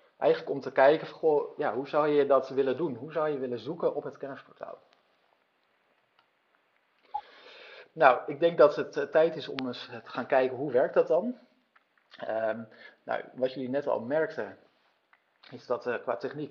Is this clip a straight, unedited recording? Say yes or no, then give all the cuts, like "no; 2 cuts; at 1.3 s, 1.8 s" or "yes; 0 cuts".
yes; 0 cuts